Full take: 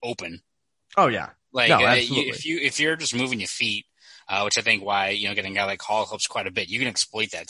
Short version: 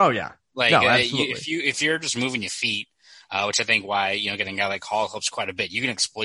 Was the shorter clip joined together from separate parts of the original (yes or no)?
no